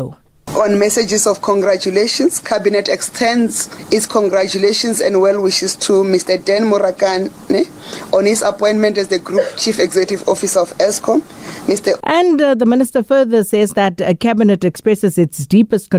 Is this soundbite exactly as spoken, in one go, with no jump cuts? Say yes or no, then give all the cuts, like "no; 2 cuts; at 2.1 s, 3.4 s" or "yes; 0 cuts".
no; 1 cut; at 12.0 s